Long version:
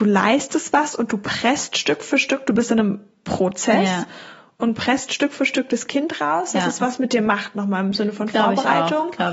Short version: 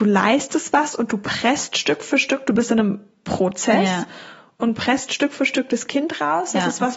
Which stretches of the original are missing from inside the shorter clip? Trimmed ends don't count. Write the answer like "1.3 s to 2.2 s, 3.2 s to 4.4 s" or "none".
none